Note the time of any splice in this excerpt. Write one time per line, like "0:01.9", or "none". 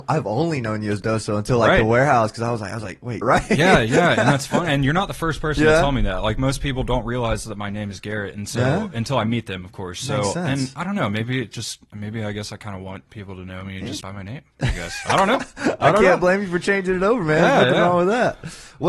0:03.2
0:14.0